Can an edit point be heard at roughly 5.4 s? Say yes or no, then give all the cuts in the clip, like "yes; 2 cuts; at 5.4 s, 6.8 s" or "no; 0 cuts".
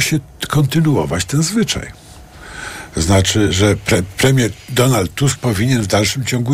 yes; 1 cut; at 5.4 s